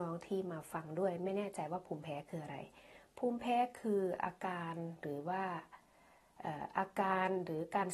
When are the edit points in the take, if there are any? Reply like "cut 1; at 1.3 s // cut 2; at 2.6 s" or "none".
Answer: none